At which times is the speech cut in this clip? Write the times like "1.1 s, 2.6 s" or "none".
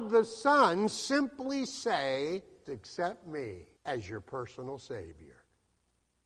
2.6 s, 3.7 s